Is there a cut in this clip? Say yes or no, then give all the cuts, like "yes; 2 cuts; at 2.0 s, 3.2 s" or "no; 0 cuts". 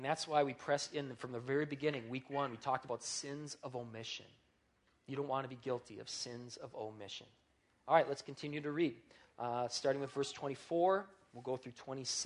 no; 0 cuts